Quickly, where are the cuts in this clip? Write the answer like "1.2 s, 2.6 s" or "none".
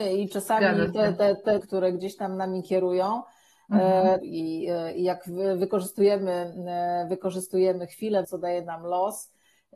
1.6 s, 4.2 s, 8.2 s

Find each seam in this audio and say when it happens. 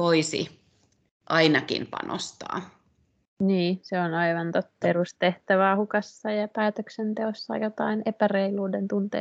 4.8 s

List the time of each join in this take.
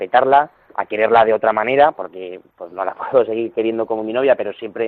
none

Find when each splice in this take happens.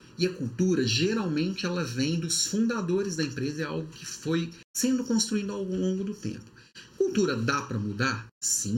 none

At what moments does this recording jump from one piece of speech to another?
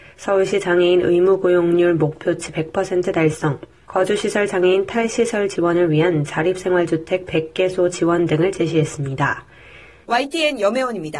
3.8 s, 10.0 s

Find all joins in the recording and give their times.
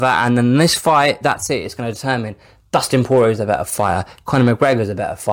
1.2 s

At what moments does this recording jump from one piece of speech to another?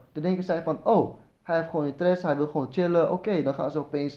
none

